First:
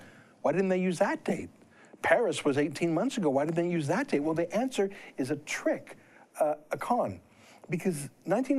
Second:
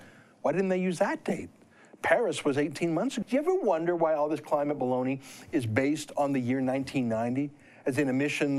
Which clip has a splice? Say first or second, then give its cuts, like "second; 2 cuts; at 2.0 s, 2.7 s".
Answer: second; 1 cut; at 3.2 s